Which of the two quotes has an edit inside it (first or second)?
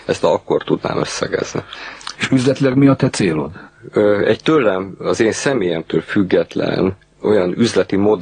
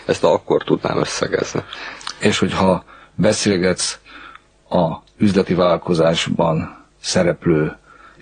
first